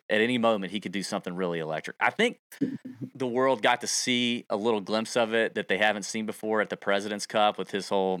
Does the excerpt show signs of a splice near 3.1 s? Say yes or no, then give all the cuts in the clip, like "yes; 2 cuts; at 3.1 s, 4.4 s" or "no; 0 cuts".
yes; 1 cut; at 3.1 s